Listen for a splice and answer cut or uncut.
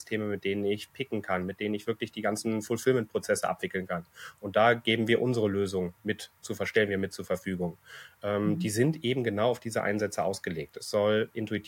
uncut